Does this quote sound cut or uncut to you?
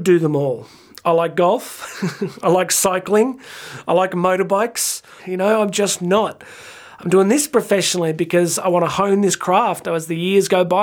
cut